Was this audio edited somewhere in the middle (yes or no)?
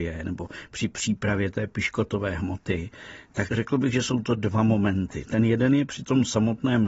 yes